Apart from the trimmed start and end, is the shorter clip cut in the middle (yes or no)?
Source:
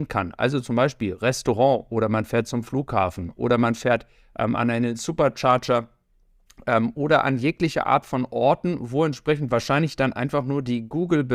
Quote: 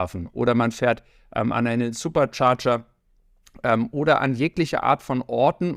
no